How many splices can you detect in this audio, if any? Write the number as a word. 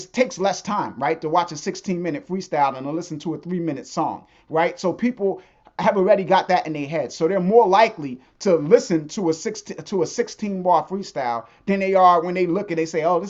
zero